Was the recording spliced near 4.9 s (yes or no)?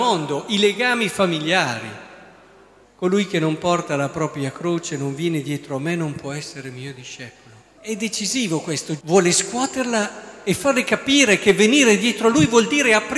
no